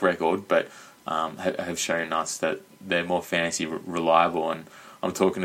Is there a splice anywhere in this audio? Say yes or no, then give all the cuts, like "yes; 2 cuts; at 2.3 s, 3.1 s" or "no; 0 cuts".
no; 0 cuts